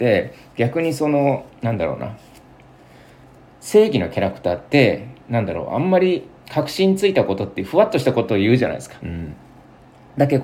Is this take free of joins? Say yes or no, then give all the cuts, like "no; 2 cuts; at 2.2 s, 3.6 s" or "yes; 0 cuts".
no; 1 cut; at 9.0 s